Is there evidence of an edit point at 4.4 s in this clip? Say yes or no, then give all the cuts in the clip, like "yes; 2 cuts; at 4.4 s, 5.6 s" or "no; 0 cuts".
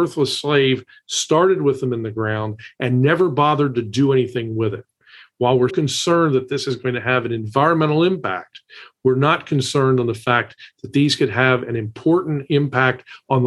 no; 1 cut; at 5.7 s